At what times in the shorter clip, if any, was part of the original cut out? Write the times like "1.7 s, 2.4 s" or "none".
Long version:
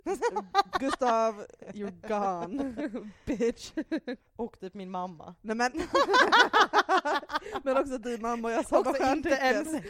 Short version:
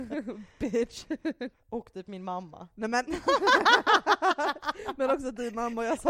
none